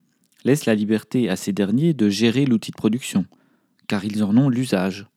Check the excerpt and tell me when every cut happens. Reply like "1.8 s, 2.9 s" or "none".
none